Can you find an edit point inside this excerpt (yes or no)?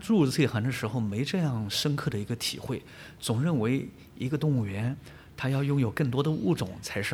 no